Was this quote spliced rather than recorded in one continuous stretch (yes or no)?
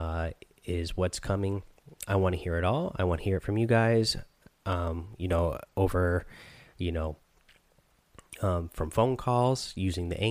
no